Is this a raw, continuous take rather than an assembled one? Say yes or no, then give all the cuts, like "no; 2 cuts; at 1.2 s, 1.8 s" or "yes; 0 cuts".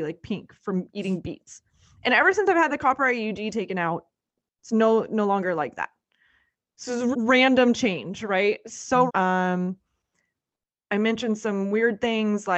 no; 2 cuts; at 7.1 s, 9.1 s